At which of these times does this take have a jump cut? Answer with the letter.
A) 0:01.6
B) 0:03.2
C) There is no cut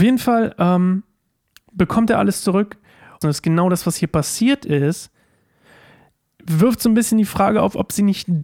B